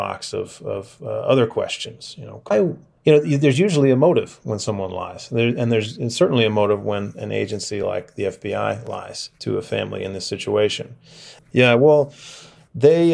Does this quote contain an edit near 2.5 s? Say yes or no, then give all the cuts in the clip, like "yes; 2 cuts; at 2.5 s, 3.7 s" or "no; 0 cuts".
yes; 2 cuts; at 2.5 s, 11.4 s